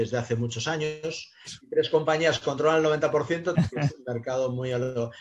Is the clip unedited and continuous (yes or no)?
no